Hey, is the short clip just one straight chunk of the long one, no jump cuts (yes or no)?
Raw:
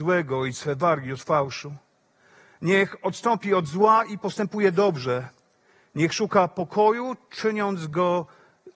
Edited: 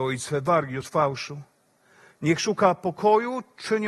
no